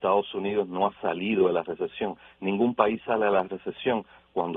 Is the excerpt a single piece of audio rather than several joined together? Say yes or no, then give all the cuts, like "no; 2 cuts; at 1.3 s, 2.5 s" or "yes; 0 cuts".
yes; 0 cuts